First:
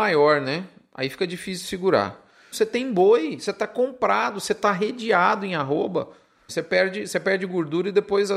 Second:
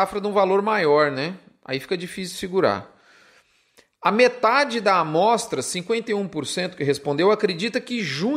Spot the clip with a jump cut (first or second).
first